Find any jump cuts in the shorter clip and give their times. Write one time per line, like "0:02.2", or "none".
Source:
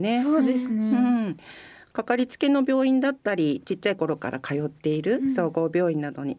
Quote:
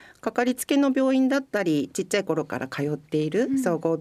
none